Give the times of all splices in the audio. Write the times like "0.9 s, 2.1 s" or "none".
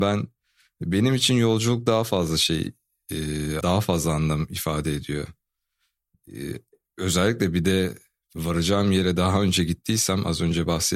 3.6 s